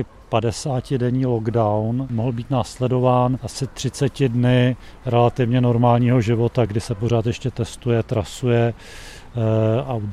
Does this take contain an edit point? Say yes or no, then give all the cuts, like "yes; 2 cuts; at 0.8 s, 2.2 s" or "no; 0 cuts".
no; 0 cuts